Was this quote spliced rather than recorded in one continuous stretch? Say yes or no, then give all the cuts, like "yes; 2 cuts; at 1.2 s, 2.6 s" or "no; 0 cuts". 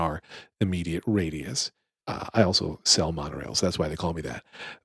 yes; 1 cut; at 2.0 s